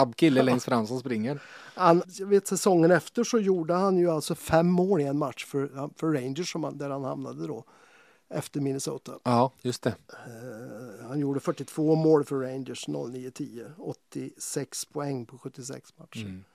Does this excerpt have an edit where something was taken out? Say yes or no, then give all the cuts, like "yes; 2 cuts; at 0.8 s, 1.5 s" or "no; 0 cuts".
yes; 1 cut; at 2.0 s